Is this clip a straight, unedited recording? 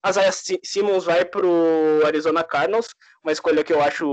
yes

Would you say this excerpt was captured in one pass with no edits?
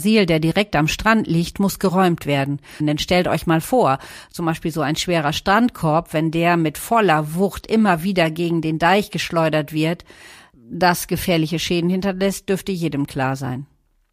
no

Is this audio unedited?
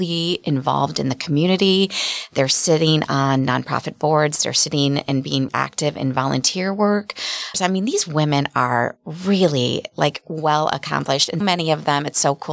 no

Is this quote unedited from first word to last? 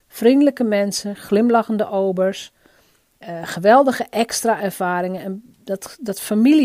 yes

